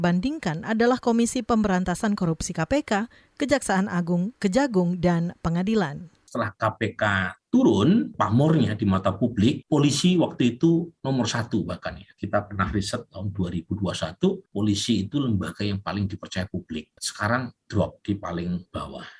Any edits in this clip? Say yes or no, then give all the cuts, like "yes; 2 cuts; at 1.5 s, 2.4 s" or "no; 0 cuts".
no; 0 cuts